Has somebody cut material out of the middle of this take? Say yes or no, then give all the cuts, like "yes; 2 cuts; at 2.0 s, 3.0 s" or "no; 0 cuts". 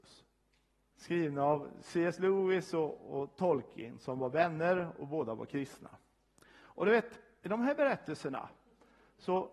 yes; 1 cut; at 0.9 s